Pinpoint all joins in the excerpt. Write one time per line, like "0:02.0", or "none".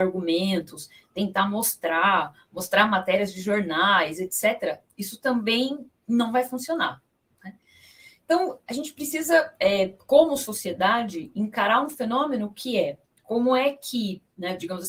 none